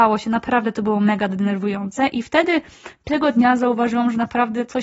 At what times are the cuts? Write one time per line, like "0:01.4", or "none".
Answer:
none